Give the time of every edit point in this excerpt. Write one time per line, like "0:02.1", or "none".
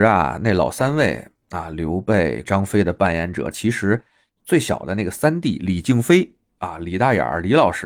0:02.4
0:03.5

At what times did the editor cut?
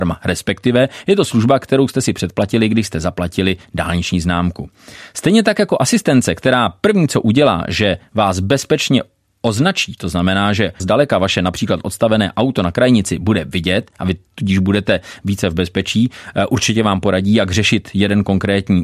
0:10.8

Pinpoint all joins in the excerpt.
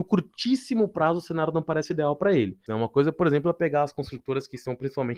0:02.7

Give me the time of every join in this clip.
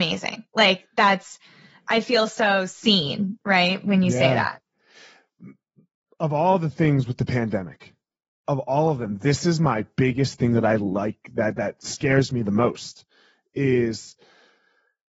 none

